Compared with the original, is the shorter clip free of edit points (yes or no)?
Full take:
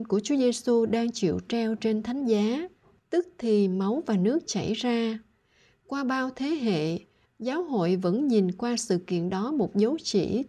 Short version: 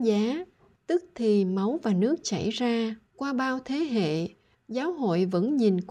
no